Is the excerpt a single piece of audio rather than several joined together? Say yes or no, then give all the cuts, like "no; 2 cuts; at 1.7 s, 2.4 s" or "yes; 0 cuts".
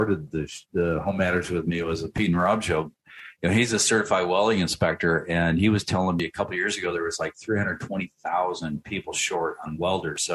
yes; 0 cuts